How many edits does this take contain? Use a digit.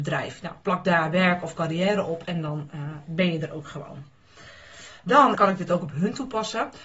1